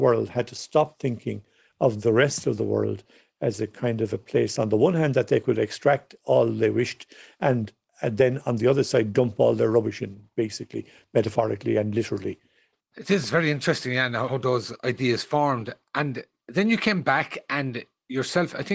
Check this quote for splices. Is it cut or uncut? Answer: uncut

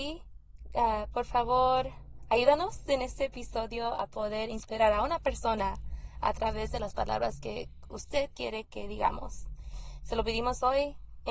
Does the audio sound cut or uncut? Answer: uncut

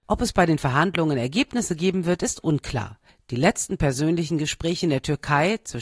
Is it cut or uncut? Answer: uncut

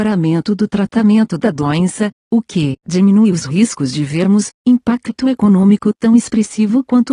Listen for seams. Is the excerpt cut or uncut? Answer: cut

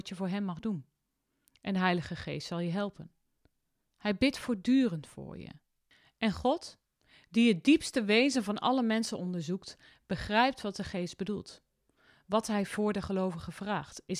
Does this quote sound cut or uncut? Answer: uncut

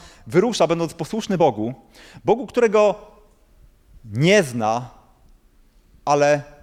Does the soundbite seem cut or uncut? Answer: uncut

